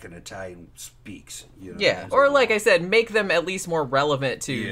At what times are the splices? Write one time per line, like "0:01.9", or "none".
0:02.1